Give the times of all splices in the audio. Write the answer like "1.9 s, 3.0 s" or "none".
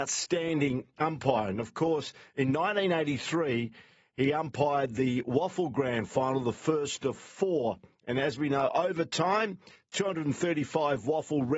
none

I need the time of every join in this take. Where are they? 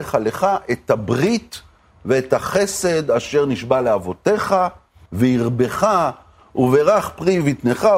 5.1 s

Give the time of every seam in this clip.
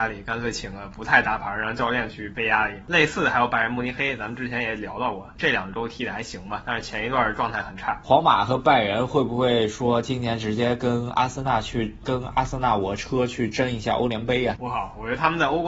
5.4 s

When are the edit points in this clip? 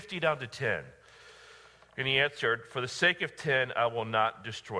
none

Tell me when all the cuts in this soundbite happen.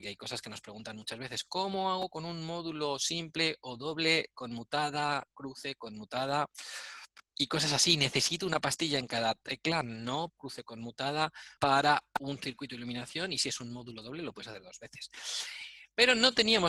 7.3 s, 10.3 s, 11.6 s

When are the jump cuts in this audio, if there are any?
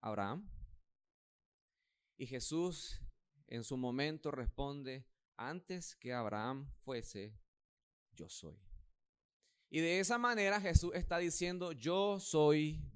none

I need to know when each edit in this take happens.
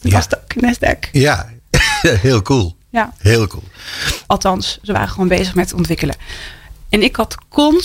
4.3 s, 6.8 s

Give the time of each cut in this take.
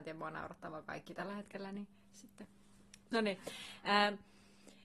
3.1 s

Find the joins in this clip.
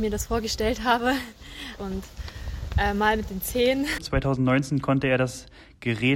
1.8 s, 4.0 s

